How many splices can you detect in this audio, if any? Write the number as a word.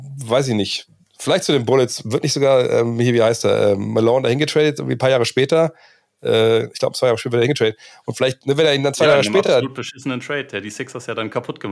zero